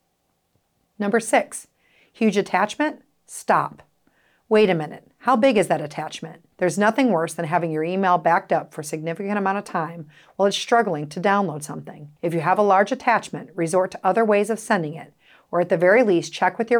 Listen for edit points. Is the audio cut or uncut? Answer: cut